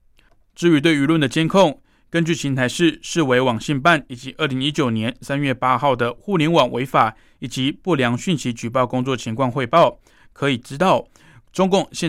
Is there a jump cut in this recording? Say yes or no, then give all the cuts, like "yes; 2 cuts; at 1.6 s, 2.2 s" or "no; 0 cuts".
no; 0 cuts